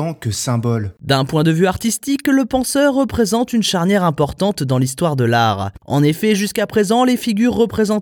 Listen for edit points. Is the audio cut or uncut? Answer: cut